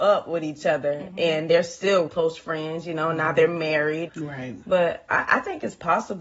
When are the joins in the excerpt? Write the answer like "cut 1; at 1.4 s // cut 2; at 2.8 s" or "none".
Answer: cut 1; at 2.1 s // cut 2; at 4.1 s